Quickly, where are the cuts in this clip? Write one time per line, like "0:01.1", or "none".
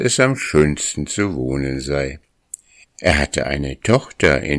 0:02.8